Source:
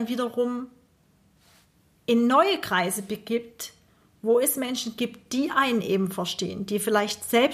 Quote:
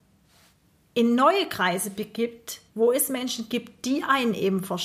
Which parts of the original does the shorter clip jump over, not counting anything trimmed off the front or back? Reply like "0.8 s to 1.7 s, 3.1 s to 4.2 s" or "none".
3.8 s to 4.2 s